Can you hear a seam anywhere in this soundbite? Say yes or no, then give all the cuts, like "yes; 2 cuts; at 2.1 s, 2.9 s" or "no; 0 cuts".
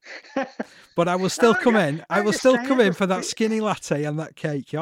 no; 0 cuts